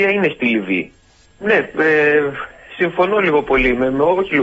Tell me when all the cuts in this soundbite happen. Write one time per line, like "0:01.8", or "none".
0:01.2